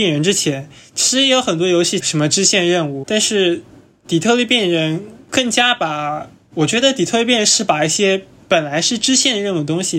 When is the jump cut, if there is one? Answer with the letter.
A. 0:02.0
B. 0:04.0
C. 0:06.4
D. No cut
A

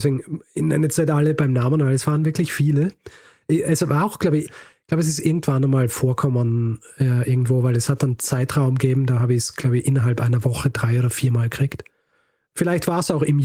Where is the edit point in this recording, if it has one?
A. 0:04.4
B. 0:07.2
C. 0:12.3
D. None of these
A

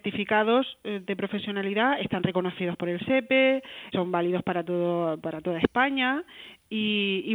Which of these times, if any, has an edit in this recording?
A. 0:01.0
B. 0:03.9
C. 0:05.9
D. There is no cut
B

